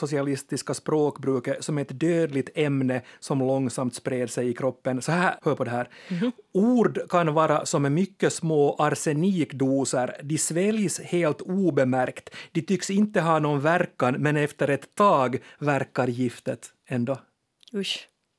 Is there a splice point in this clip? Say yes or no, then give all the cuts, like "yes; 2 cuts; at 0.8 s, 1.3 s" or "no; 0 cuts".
yes; 1 cut; at 5.4 s